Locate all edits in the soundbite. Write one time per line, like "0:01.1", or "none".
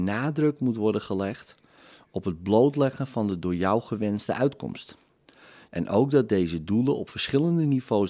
0:05.7